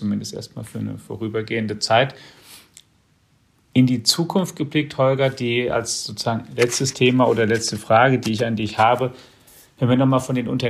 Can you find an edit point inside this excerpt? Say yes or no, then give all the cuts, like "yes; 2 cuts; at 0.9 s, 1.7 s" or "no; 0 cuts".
no; 0 cuts